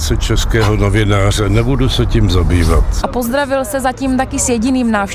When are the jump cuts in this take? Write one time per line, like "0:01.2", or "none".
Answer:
none